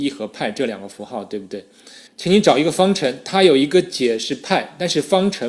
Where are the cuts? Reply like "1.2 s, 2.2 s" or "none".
2.1 s